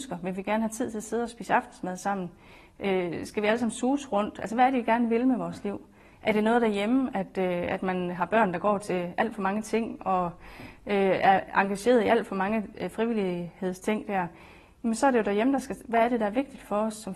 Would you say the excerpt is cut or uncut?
cut